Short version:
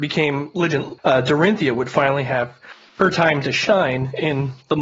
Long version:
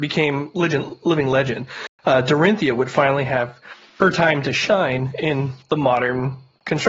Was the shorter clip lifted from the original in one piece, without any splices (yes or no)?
no